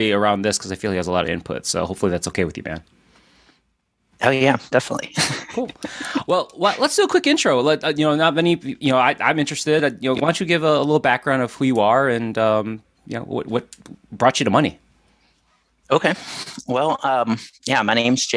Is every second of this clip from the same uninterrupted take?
yes; 0 cuts

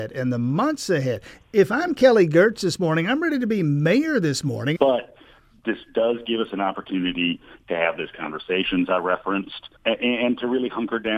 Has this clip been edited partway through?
yes; 2 cuts; at 4.8 s, 9.8 s

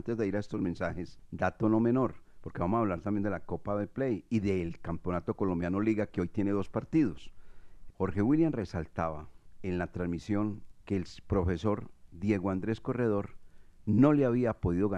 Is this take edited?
yes; 2 cuts; at 7.9 s, 10.8 s

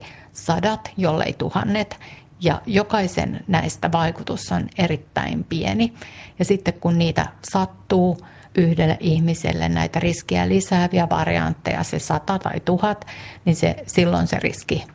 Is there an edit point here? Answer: no; 0 cuts

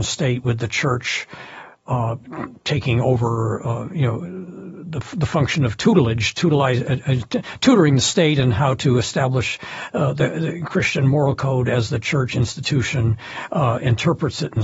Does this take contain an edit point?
no; 0 cuts

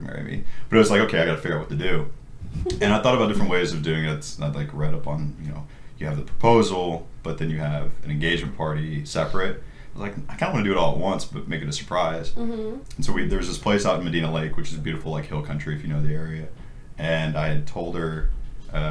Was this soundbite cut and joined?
no; 0 cuts

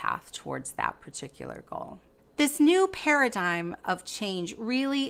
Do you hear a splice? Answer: no; 0 cuts

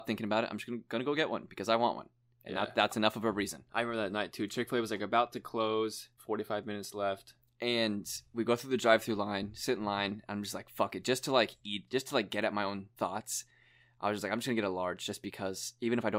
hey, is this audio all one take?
yes; 0 cuts

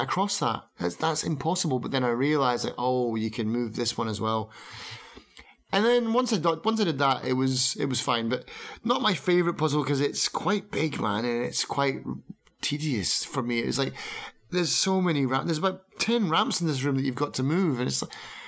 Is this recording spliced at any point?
no; 0 cuts

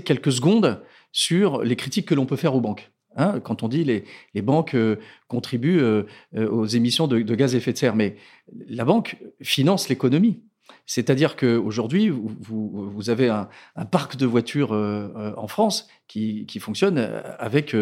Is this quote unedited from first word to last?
yes; 0 cuts

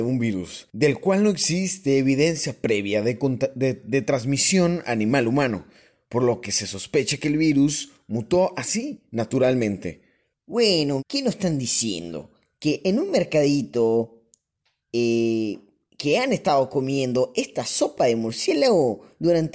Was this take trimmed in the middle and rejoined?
yes; 1 cut; at 11.0 s

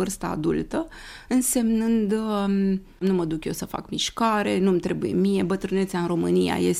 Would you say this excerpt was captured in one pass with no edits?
yes; 0 cuts

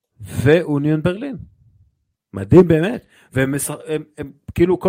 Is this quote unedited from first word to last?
no; 1 cut; at 2.2 s

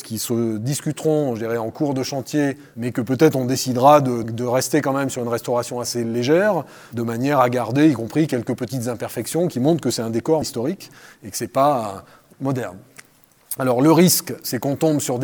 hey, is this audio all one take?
no; 3 cuts; at 4.2 s, 10.4 s, 12.3 s

